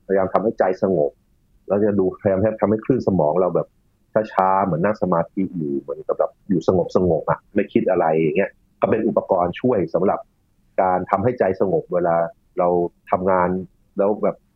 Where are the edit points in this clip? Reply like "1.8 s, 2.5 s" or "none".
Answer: none